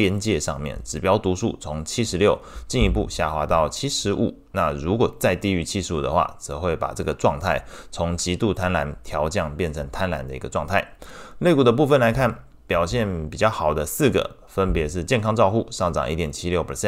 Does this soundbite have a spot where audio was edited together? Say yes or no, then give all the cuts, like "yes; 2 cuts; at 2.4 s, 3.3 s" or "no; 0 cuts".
no; 0 cuts